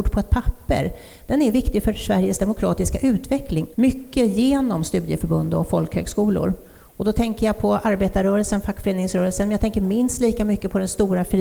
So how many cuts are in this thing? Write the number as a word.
one